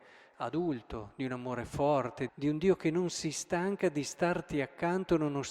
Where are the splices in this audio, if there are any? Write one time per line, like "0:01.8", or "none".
0:02.3